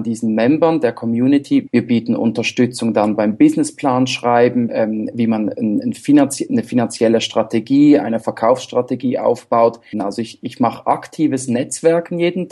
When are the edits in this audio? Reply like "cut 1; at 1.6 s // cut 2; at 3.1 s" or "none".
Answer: cut 1; at 1.7 s // cut 2; at 4.7 s // cut 3; at 9.9 s